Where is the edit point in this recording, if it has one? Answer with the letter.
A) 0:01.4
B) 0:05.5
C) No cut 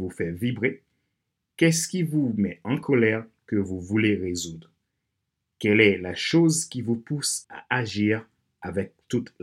C